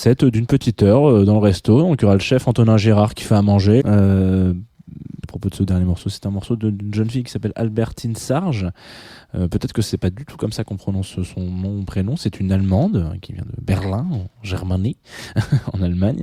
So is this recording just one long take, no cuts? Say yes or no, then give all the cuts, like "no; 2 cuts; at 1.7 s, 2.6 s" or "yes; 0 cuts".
no; 2 cuts; at 3.8 s, 5.2 s